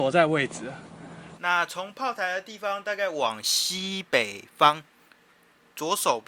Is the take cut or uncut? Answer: cut